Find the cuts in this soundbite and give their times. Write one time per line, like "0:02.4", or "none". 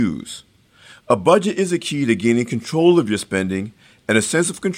none